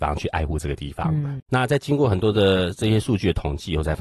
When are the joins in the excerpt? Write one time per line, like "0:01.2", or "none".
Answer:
0:01.4